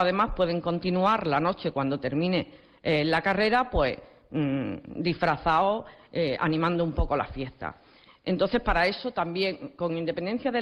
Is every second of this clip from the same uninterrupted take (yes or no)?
yes